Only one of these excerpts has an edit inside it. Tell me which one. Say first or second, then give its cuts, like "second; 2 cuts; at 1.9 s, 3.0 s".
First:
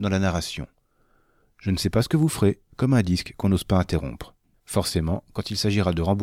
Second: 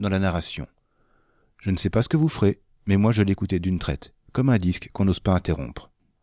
first; 2 cuts; at 2.7 s, 4.5 s